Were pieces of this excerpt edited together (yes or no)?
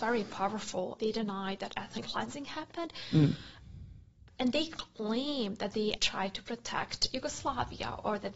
yes